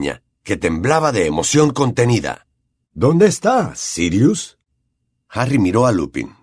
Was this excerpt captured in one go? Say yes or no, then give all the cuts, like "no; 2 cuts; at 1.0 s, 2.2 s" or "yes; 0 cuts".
yes; 0 cuts